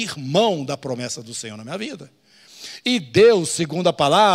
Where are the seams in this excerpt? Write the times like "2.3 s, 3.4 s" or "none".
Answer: none